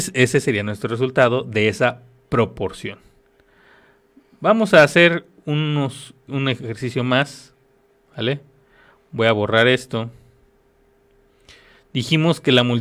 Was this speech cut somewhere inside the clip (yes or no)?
yes